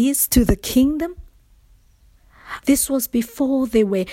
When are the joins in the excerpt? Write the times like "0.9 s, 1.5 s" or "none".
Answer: 2.6 s